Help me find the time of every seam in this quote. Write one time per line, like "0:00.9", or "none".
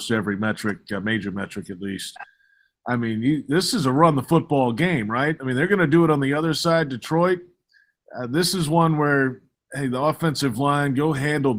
none